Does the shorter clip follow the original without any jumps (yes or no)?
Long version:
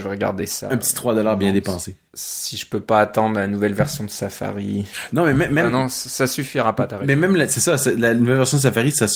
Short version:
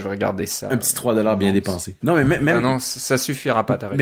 no